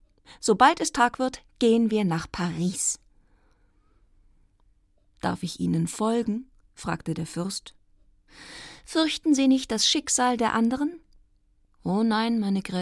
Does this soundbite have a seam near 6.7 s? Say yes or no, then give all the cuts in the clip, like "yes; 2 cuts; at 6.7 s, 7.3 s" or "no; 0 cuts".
no; 0 cuts